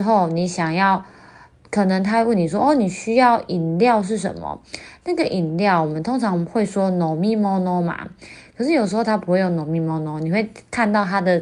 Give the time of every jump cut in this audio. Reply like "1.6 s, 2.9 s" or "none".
none